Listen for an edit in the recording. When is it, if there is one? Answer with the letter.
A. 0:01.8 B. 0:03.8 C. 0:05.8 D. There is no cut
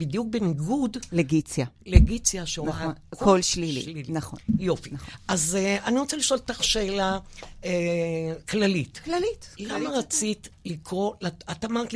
D